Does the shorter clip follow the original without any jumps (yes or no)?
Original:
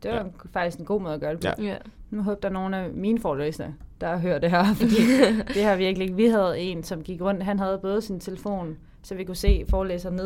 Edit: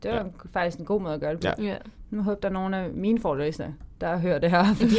yes